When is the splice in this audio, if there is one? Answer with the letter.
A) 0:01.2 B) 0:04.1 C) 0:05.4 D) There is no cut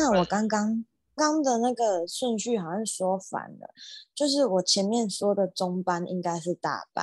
A